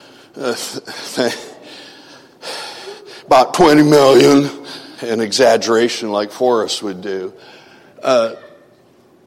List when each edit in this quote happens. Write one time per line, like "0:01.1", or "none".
0:05.0